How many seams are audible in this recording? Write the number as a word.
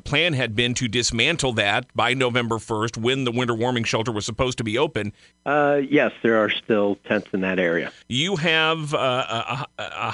two